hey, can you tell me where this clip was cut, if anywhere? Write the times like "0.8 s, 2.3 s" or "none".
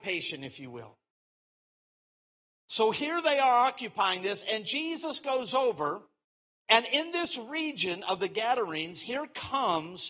none